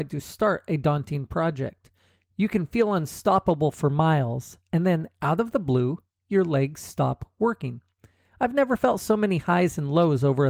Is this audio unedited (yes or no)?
yes